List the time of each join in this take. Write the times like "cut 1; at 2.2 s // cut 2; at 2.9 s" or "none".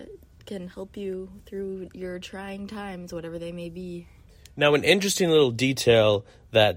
none